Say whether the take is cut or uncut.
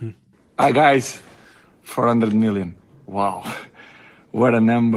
uncut